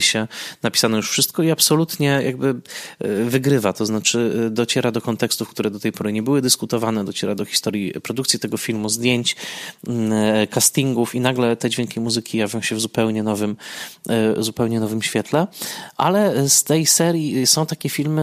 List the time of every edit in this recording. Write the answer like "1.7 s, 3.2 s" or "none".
none